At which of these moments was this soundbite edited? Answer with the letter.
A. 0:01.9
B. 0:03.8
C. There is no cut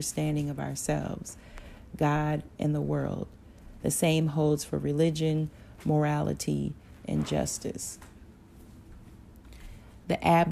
C